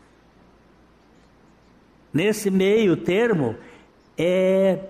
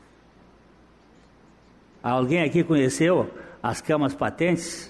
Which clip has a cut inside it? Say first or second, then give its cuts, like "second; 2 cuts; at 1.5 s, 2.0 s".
second; 1 cut; at 1.9 s